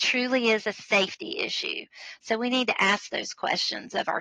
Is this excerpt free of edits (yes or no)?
yes